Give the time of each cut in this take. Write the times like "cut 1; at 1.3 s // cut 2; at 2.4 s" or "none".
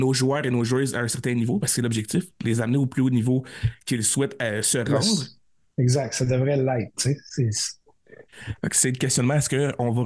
none